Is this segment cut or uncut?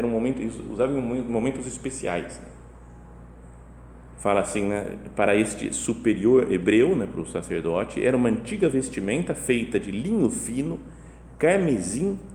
cut